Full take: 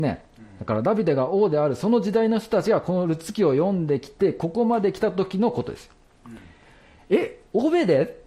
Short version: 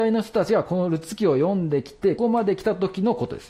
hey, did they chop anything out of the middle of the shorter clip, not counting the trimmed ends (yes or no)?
yes